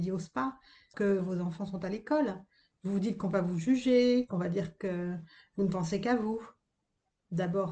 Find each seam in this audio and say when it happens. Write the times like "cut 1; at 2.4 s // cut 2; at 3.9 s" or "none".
cut 1; at 0.9 s